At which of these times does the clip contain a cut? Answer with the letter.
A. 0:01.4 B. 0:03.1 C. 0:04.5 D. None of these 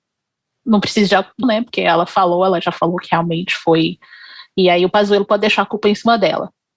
A